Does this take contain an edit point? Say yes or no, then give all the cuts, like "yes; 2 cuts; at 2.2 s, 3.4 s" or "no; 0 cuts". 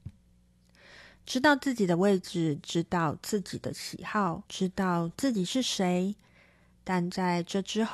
yes; 2 cuts; at 1.1 s, 4.5 s